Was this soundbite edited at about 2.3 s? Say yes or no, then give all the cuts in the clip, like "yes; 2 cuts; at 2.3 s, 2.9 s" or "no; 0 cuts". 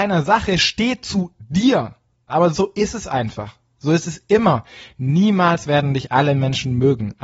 yes; 1 cut; at 2.3 s